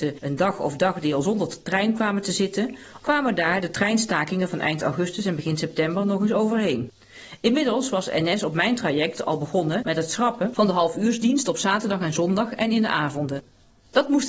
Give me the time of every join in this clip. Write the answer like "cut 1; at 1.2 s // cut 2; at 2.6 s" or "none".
cut 1; at 3.0 s

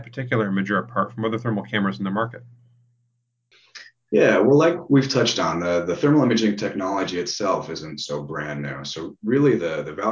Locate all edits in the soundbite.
none

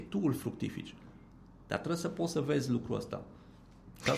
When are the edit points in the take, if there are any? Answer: none

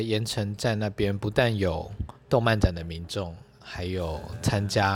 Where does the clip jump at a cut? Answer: none

